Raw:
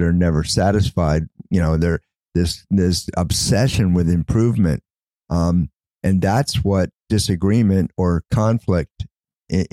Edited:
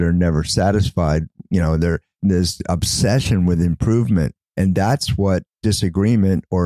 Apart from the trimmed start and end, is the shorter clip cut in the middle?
yes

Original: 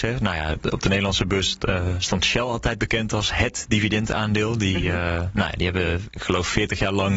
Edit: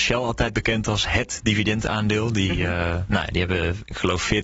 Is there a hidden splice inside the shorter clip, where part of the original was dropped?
no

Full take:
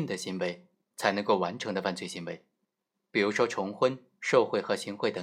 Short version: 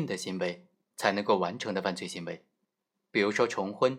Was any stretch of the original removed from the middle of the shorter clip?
no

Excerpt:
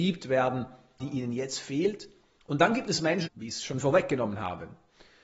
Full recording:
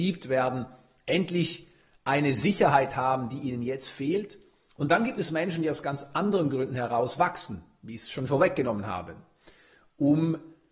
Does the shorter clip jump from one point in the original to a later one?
yes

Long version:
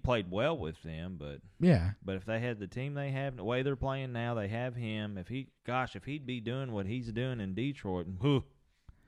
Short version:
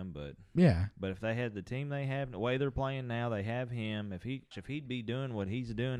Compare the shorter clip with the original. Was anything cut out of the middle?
yes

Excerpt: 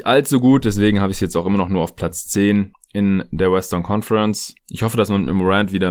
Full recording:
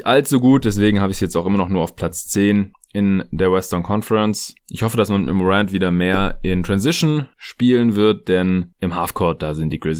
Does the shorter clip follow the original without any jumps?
yes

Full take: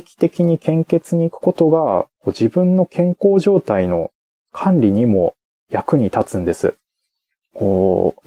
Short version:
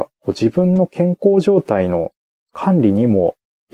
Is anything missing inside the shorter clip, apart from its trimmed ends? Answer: no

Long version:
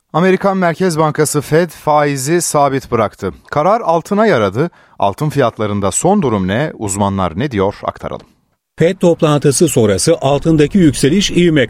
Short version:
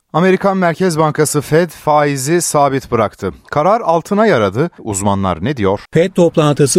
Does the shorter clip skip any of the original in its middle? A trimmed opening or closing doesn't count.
yes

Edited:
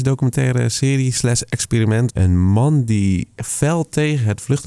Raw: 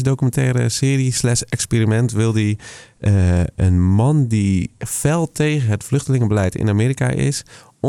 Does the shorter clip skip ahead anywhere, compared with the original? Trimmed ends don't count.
yes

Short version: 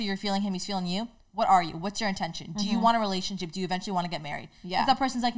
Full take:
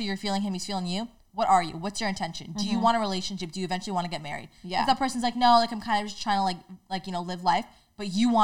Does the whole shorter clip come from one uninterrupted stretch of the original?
yes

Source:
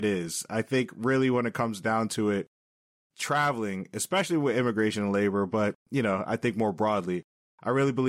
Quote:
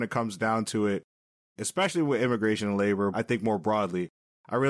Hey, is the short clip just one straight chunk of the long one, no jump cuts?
no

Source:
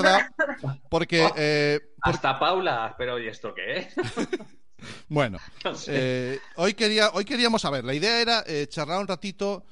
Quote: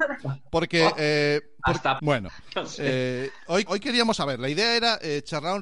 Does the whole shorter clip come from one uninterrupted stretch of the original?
no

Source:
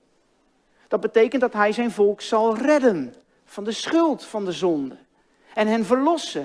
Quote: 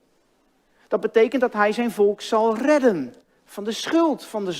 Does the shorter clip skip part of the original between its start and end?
no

